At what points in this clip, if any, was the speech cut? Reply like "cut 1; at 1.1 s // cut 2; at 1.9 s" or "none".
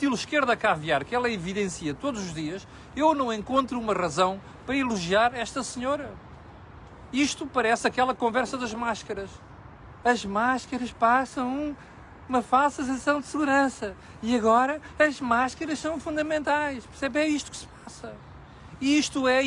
cut 1; at 10.0 s